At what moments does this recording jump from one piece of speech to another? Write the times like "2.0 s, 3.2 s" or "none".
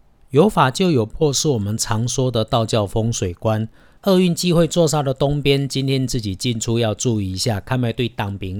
4.0 s

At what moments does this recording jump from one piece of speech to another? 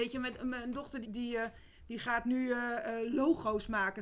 1.0 s

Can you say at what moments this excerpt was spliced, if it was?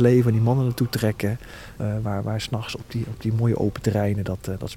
1.8 s

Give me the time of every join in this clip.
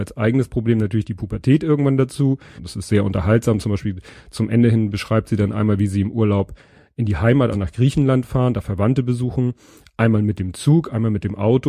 2.6 s, 7.5 s

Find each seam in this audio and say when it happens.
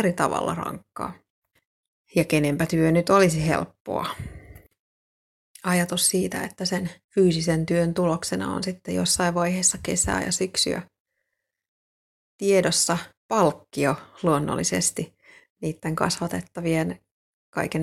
7.0 s, 13.2 s

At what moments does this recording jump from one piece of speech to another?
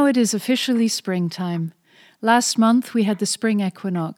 none

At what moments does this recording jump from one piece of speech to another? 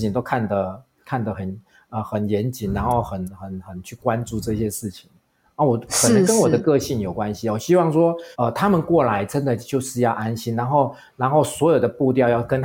8.3 s

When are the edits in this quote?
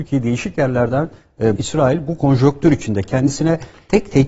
1.6 s

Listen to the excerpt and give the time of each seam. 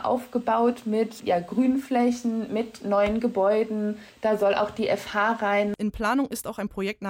5.8 s

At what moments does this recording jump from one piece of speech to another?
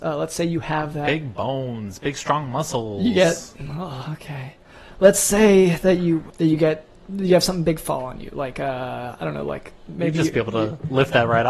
none

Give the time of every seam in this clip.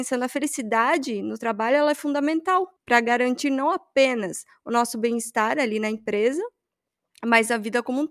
2.8 s

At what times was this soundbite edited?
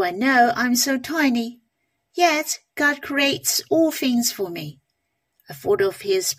5.3 s

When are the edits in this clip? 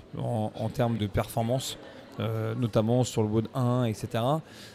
1.0 s

